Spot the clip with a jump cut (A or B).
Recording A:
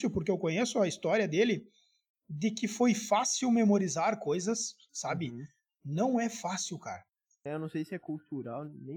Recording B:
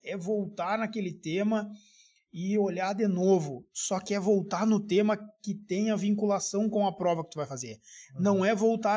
A